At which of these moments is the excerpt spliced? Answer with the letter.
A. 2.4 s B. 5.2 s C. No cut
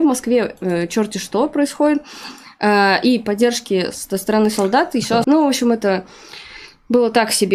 B